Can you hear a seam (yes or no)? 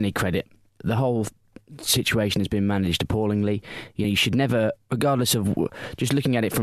no